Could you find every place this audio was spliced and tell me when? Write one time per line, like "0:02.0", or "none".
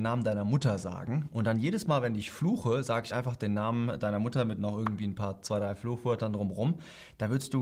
none

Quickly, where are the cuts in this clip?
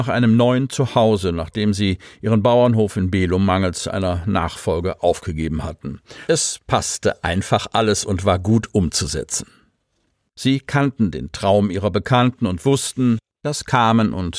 0:06.3
0:10.3

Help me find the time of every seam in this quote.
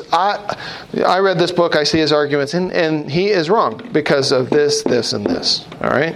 none

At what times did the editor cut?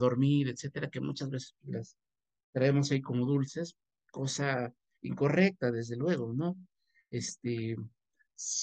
none

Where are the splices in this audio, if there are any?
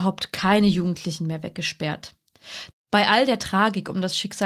0:02.7

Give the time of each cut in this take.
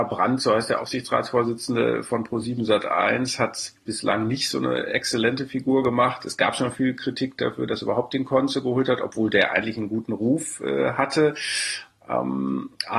none

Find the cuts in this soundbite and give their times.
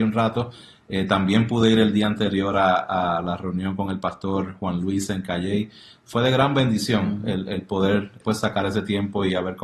0:08.2

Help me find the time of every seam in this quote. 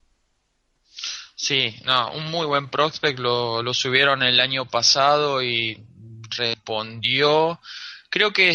none

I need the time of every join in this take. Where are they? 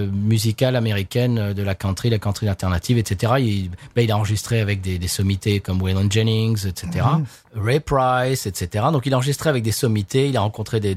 none

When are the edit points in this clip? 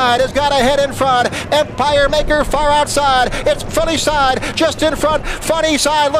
0:01.5
0:05.2

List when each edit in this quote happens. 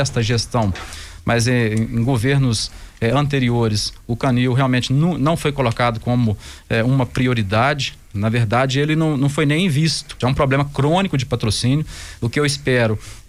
0:10.2

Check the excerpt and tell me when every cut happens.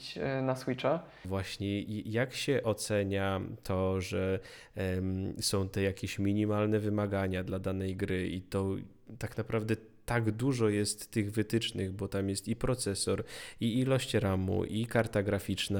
0:01.2

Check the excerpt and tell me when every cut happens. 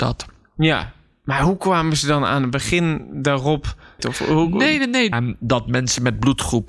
0:04.0
0:05.1

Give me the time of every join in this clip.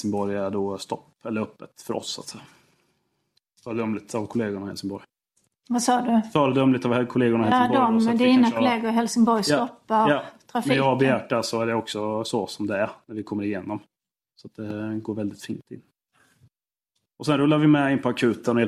0:14.2

